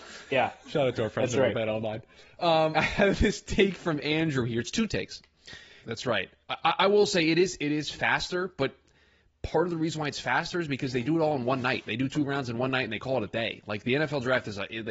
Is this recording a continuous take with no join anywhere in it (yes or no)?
no